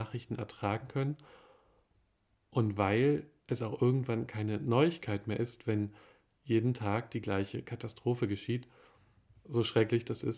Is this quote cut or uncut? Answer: uncut